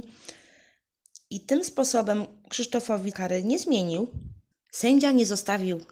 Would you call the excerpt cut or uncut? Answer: cut